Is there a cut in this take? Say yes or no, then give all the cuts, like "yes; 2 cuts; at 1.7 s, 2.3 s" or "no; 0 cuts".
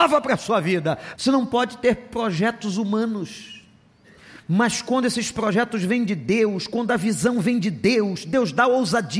yes; 1 cut; at 1.1 s